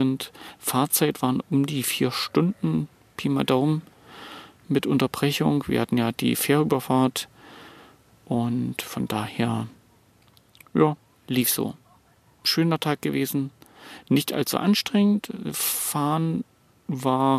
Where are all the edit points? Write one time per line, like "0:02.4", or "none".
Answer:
none